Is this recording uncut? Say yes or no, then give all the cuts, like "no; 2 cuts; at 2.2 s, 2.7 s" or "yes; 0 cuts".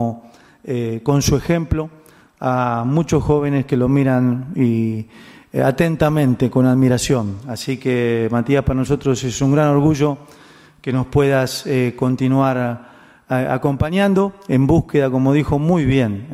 yes; 0 cuts